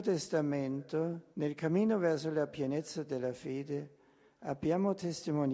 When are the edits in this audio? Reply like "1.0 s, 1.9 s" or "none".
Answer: 1.3 s